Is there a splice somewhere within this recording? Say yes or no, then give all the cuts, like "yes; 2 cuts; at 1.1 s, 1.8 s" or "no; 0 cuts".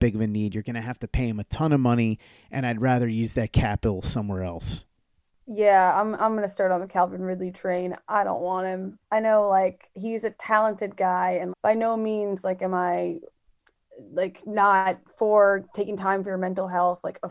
yes; 1 cut; at 11.5 s